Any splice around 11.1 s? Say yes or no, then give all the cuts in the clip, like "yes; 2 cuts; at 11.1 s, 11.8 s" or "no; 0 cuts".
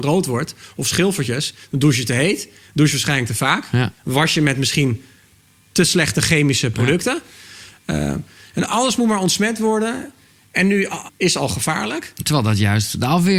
yes; 1 cut; at 11.1 s